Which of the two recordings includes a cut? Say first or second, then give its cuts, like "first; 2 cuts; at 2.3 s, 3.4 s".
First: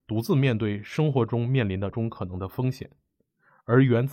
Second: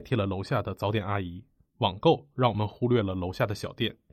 first; 1 cut; at 1.9 s